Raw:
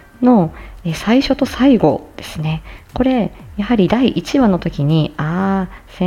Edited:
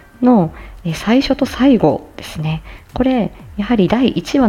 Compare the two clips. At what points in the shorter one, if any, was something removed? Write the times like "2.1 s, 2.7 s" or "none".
none